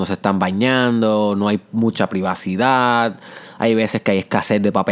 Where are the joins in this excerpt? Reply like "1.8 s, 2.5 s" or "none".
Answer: none